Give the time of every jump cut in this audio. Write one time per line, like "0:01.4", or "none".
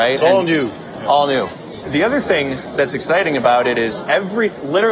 0:01.8